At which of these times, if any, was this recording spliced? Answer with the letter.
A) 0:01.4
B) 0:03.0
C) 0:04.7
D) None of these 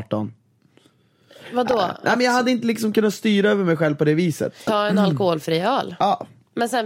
C